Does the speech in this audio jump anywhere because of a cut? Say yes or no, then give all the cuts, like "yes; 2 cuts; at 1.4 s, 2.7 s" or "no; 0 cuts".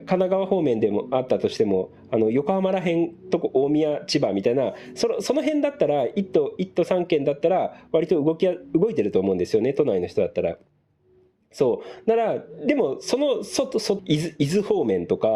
yes; 1 cut; at 14.0 s